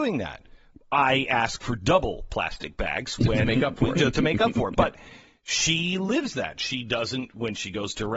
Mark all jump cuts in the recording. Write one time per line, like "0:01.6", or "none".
none